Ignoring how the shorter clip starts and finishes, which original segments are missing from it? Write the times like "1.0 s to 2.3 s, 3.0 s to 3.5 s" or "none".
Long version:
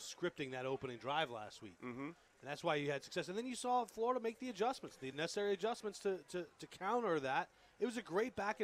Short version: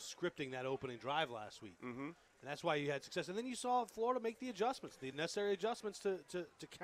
none